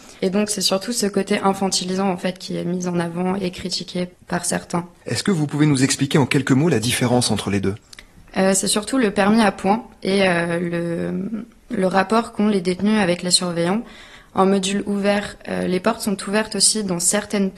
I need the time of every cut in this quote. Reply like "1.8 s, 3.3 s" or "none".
5.0 s